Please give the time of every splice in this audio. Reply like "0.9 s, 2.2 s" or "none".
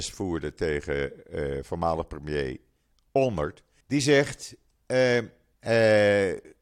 3.8 s, 5.5 s